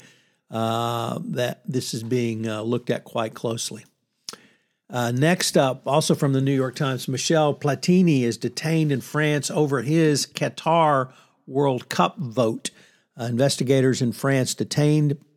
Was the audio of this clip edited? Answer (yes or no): no